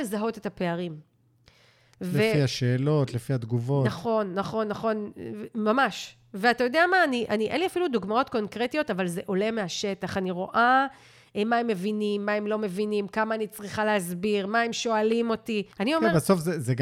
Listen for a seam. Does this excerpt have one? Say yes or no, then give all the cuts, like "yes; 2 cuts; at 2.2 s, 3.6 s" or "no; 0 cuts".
yes; 1 cut; at 15.7 s